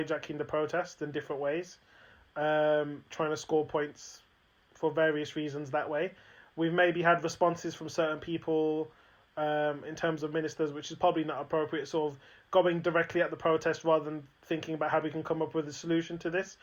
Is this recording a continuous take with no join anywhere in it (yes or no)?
yes